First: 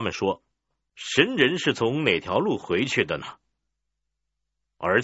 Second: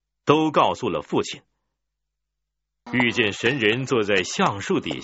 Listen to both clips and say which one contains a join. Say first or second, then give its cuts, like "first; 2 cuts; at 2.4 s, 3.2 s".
second; 1 cut; at 2.9 s